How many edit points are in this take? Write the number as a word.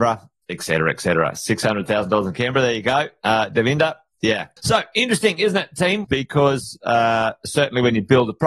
two